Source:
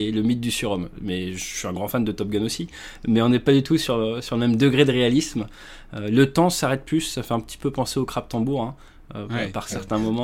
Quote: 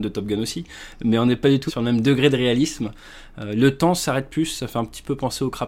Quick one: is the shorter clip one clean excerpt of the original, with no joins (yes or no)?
no